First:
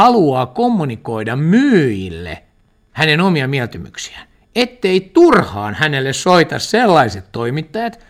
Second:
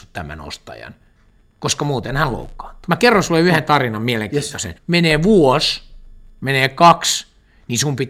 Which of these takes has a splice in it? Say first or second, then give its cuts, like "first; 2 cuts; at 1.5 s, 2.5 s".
second; 2 cuts; at 2.9 s, 4.7 s